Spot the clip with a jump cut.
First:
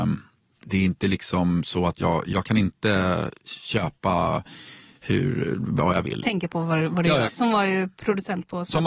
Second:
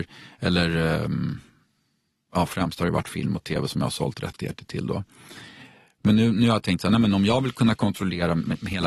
first; 2 cuts; at 6.2 s, 7.3 s

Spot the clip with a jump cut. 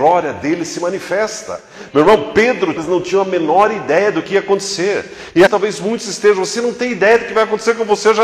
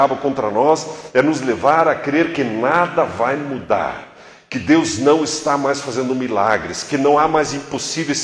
first; 2 cuts; at 2.8 s, 5.5 s

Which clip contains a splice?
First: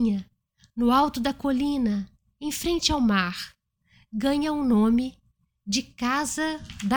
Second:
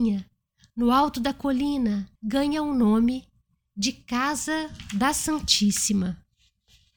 second; 1 cut; at 2.2 s

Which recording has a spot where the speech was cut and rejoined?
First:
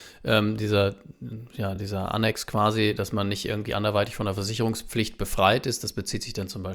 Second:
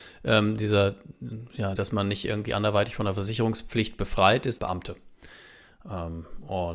second; 2 cuts; at 1.8 s, 4.6 s

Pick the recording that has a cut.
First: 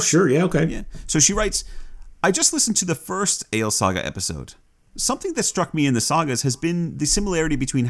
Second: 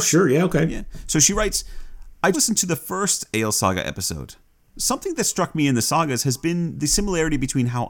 second; 1 cut; at 2.3 s

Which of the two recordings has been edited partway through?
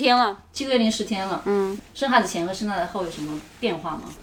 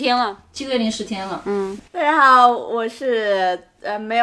second; 1 cut; at 1.9 s

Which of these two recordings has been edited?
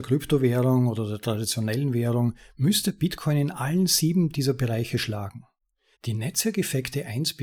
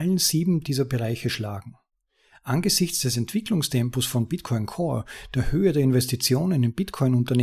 first; 1 cut; at 5.9 s

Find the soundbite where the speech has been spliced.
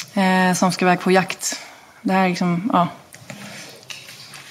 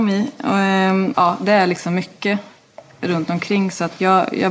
second; 1 cut; at 1.1 s

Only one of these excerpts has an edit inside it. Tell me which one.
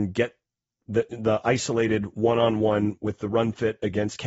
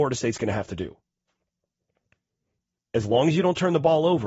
second; 1 cut; at 2.8 s

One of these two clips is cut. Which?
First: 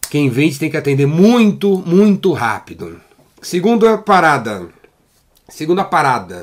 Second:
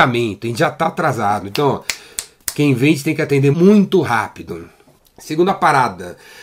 second; 2 cuts; at 3.5 s, 5.0 s

